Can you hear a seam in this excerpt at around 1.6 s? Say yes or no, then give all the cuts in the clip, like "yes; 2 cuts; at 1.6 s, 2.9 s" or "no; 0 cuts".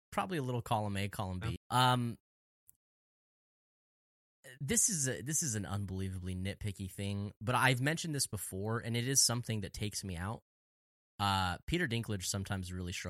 yes; 1 cut; at 1.6 s